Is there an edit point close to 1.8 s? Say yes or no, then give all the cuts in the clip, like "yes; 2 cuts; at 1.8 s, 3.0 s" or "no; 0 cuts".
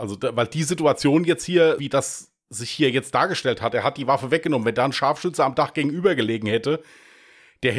yes; 1 cut; at 1.8 s